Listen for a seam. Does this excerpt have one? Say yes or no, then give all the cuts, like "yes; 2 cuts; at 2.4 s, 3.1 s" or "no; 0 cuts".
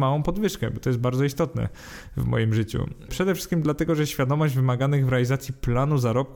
yes; 1 cut; at 3.1 s